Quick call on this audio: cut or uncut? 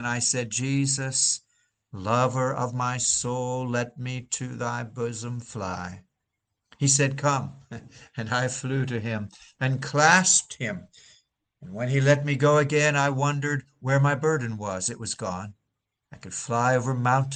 cut